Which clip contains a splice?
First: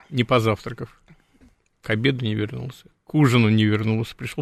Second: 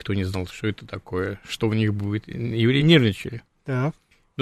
second; 1 cut; at 2.8 s

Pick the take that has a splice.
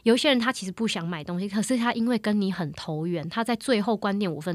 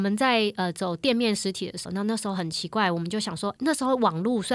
second; 1 cut; at 1.9 s

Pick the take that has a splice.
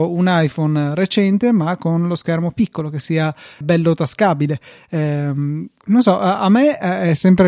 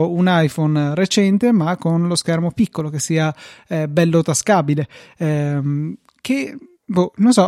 first; 2 cuts; at 3.6 s, 5.8 s

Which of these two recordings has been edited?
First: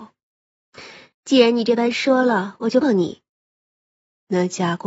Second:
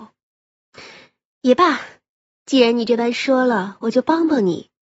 first; 2 cuts; at 1.1 s, 2.8 s

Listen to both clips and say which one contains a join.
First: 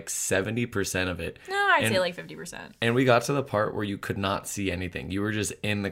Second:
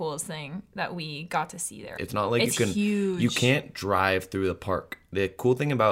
second; 1 cut; at 2.0 s

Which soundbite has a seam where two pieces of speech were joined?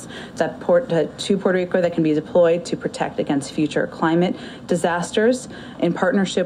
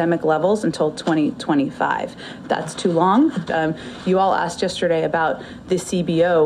second; 1 cut; at 3.5 s

